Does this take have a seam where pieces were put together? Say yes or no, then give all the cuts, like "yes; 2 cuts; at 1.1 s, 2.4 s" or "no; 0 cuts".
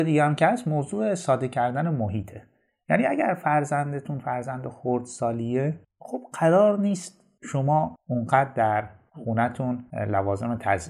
no; 0 cuts